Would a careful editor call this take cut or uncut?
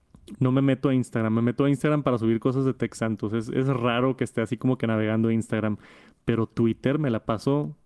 uncut